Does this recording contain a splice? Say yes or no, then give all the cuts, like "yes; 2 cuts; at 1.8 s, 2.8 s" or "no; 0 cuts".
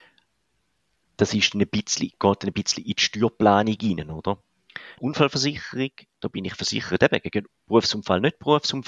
yes; 1 cut; at 5.0 s